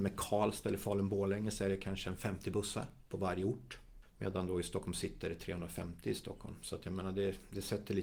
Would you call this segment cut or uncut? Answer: uncut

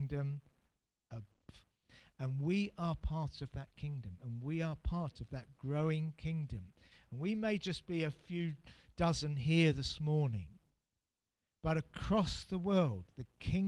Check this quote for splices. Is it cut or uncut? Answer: uncut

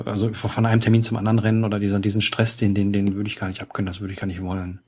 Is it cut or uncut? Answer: uncut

